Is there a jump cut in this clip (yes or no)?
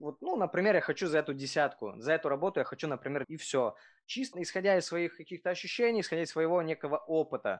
yes